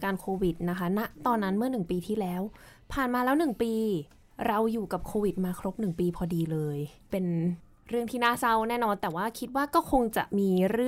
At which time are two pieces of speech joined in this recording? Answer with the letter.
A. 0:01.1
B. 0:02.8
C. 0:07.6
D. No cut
D